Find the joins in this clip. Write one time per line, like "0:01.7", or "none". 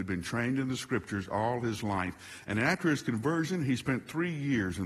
none